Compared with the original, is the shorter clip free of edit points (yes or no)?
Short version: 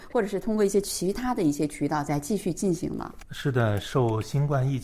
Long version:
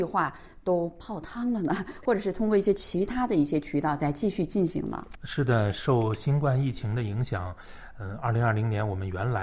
yes